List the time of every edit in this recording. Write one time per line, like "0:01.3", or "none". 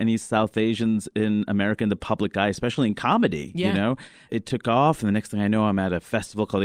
0:04.3